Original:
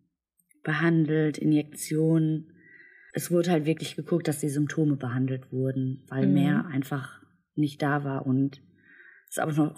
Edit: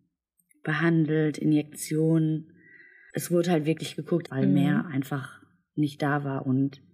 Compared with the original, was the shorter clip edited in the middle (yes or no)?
yes